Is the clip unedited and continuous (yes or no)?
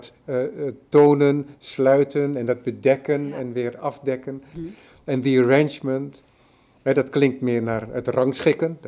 no